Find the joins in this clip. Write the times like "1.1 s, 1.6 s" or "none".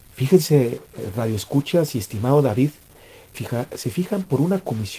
3.3 s